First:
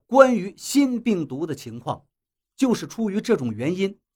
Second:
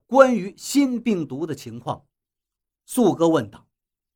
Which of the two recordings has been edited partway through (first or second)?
first